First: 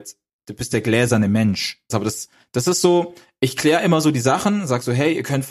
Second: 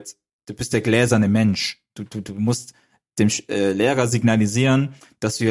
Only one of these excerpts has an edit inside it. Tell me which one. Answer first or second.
first